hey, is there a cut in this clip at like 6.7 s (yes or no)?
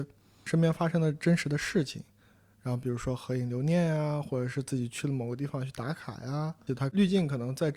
yes